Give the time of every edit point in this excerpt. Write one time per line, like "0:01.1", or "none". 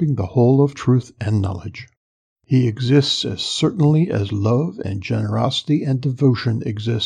0:02.4